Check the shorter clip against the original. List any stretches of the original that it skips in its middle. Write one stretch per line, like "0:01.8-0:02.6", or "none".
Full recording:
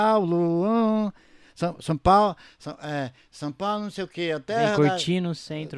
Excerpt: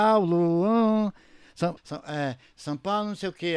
0:01.8-0:02.5